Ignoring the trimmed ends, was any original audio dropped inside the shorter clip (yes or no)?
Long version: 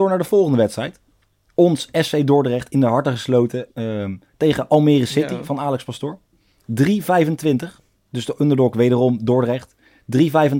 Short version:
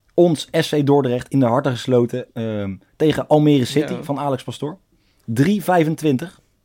no